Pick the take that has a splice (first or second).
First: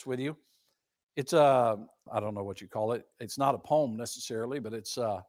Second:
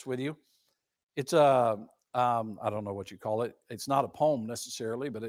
first